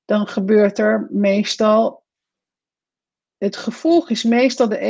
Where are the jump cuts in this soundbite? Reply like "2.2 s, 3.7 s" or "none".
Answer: none